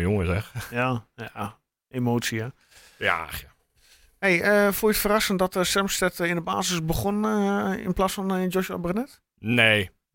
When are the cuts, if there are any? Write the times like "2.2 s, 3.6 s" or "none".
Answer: none